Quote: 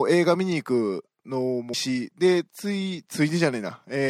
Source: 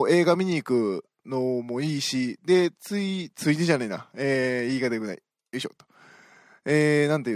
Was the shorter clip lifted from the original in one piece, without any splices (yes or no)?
no